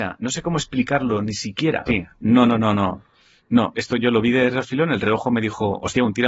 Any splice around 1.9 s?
yes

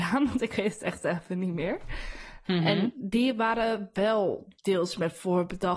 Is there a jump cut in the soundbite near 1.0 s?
no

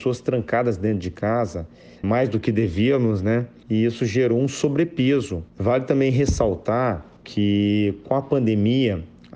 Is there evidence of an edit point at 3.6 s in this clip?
no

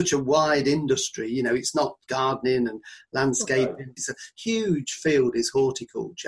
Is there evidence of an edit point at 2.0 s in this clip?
yes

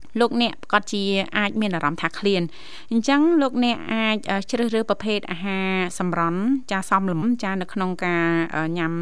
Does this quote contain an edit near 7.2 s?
yes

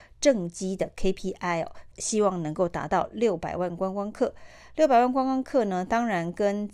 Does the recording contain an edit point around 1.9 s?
yes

